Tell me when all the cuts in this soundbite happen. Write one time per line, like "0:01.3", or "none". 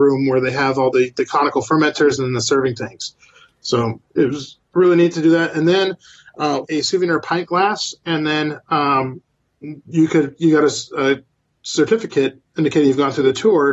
0:04.1
0:06.6